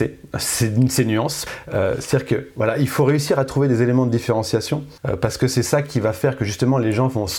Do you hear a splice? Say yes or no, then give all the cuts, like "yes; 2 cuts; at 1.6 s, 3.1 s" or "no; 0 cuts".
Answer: yes; 1 cut; at 1.5 s